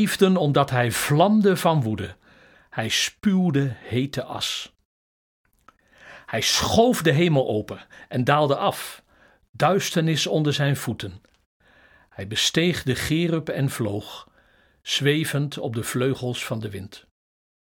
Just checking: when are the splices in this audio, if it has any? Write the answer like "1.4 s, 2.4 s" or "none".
2.5 s